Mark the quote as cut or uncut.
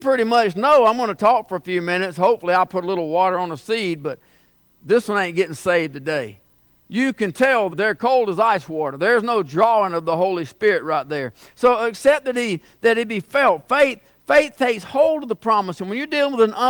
cut